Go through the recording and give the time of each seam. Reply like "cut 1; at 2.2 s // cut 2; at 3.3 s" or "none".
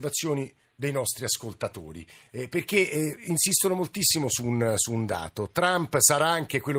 none

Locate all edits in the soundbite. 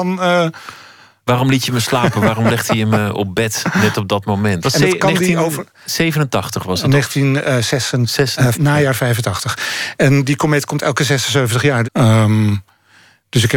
cut 1; at 4.6 s // cut 2; at 8.5 s // cut 3; at 11.8 s

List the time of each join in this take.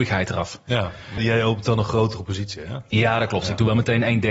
cut 1; at 1.2 s

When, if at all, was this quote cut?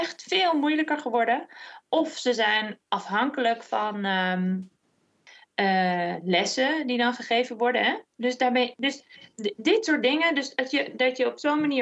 none

